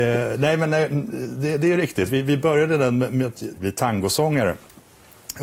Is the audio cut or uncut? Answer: cut